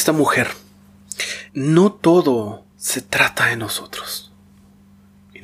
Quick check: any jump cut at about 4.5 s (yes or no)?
no